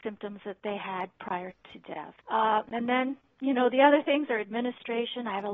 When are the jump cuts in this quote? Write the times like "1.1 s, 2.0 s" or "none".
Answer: 2.2 s